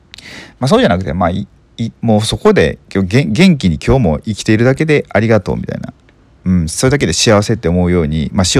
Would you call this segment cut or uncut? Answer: uncut